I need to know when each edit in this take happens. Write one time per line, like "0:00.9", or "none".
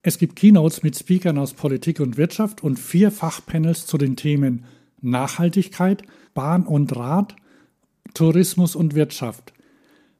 0:06.3